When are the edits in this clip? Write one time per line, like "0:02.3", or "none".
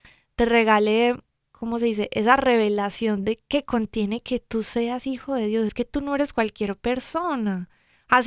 none

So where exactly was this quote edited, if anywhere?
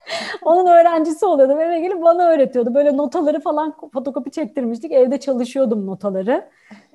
none

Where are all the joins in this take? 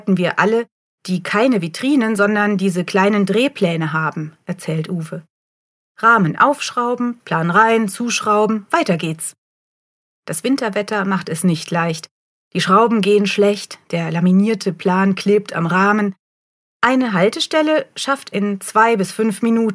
0:07.2
0:18.3

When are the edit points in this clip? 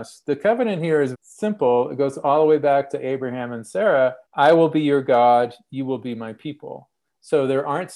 0:01.1
0:04.3

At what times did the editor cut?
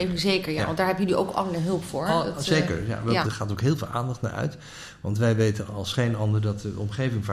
0:03.2

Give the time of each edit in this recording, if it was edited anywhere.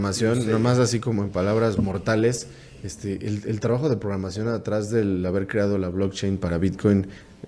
0:01.8

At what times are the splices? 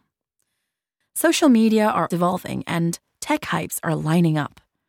0:01.0
0:02.1

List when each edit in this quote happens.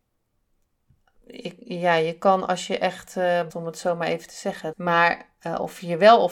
0:03.5
0:04.7

